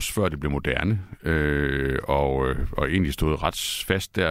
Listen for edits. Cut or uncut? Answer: uncut